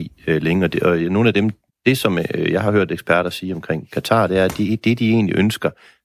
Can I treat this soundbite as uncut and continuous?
no; 1 cut; at 1.7 s

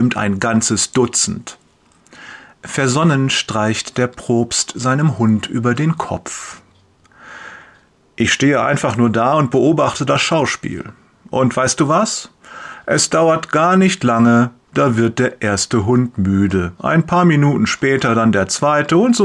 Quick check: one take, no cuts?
yes; 0 cuts

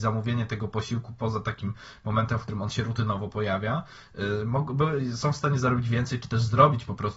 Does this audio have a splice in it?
no; 0 cuts

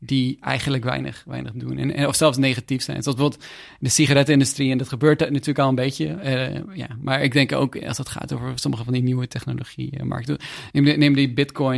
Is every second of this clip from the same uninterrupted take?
yes; 0 cuts

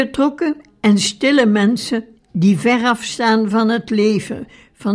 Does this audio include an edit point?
no; 0 cuts

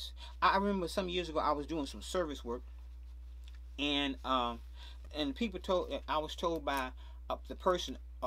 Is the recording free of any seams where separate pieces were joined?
no; 1 cut; at 5.1 s

